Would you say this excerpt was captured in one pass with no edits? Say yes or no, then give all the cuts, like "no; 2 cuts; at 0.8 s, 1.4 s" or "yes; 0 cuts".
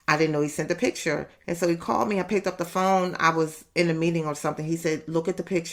yes; 0 cuts